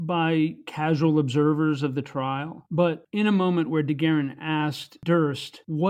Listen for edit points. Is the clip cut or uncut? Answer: uncut